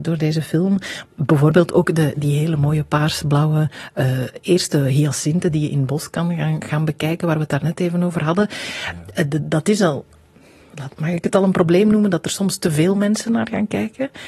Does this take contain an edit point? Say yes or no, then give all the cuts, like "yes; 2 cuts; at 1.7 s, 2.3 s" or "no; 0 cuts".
no; 0 cuts